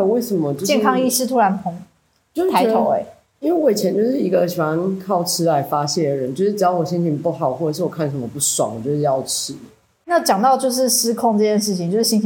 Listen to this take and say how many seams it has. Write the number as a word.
zero